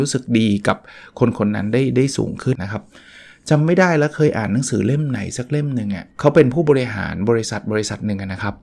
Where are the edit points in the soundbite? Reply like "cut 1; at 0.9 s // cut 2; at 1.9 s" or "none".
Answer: cut 1; at 2.6 s // cut 2; at 6.1 s